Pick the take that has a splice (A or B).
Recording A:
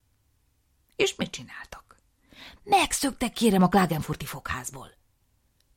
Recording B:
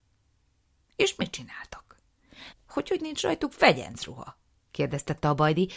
B